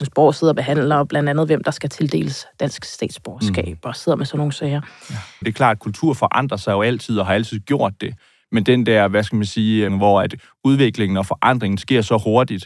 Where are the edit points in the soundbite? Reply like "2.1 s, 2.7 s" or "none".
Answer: 5.4 s, 9.9 s